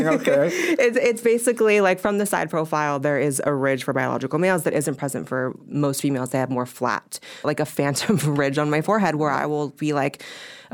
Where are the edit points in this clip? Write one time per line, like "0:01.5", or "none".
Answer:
0:05.7
0:07.4